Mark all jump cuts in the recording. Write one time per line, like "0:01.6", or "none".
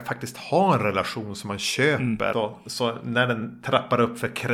0:02.3